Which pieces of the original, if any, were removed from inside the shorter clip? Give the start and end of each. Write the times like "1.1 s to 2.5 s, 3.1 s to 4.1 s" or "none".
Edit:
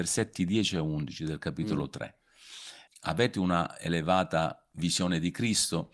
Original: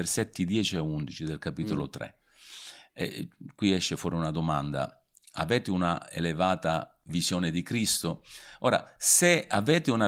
2.9 s to 5.2 s